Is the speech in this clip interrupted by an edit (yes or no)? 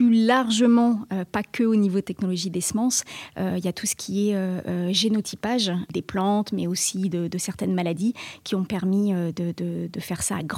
no